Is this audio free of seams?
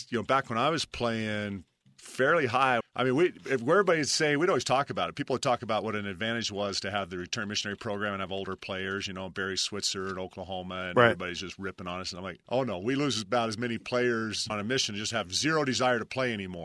no; 3 cuts; at 2.8 s, 12.4 s, 14.5 s

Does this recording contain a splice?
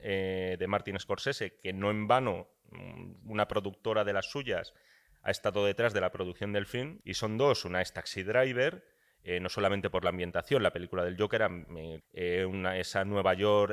yes; 2 cuts; at 7.0 s, 12.0 s

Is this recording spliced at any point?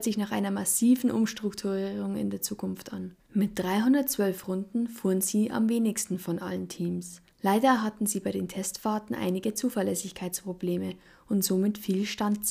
yes; 2 cuts; at 3.3 s, 7.3 s

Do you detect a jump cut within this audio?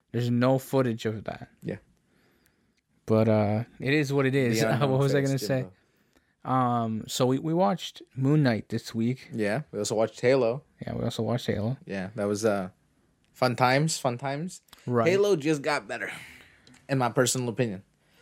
no; 0 cuts

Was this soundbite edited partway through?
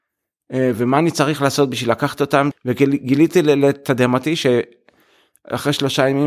yes; 1 cut; at 2.5 s

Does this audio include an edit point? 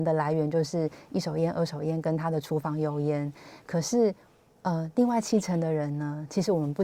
no; 0 cuts

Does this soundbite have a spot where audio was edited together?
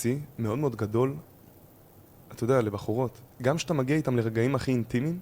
yes; 1 cut; at 3.3 s

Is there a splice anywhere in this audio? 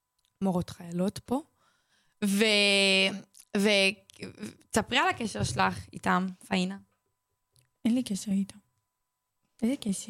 no; 0 cuts

